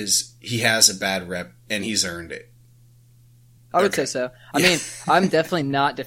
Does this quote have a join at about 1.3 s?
no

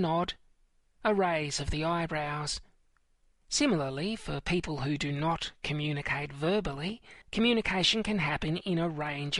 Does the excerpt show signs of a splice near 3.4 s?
yes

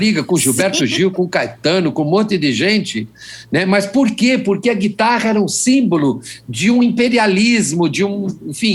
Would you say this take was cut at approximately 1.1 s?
no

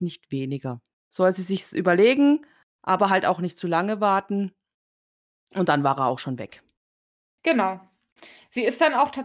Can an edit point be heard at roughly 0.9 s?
yes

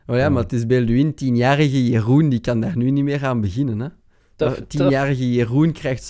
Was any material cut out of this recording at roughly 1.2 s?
no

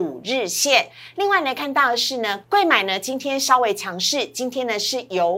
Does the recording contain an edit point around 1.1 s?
no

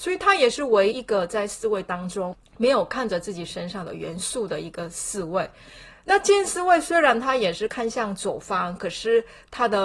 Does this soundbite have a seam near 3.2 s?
no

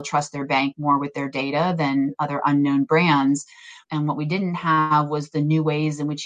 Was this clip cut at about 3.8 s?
yes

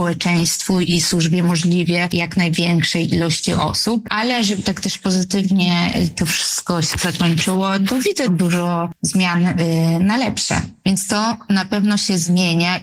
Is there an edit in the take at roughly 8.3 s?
yes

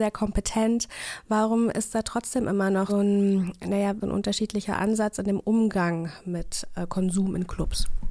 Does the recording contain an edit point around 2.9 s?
yes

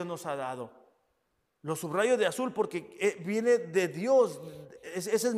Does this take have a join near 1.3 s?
no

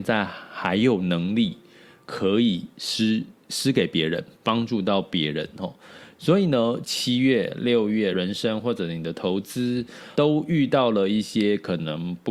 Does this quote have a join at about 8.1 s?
yes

